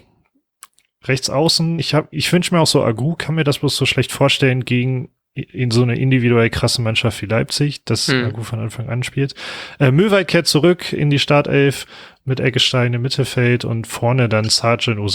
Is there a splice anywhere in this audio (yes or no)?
no